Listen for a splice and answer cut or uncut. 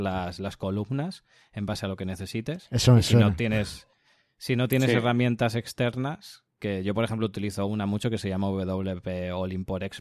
uncut